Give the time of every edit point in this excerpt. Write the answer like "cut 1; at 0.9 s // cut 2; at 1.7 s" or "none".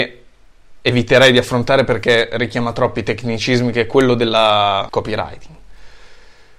cut 1; at 4.9 s